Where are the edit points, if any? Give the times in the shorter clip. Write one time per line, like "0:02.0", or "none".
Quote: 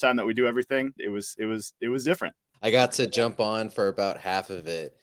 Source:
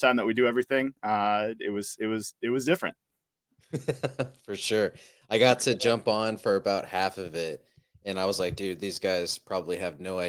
0:01.0
0:02.5